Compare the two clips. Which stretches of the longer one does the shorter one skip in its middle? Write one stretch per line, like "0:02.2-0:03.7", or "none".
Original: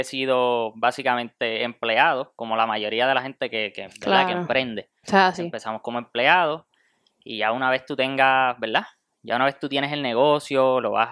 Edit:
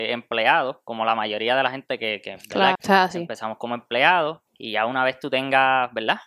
0:04.3-0:05.0
0:06.7-0:07.1